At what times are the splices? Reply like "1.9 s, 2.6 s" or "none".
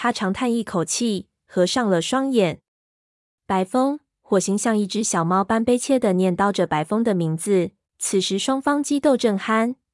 7.8 s